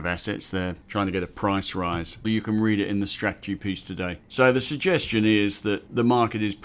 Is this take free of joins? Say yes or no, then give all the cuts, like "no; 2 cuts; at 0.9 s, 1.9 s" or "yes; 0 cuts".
no; 1 cut; at 2.2 s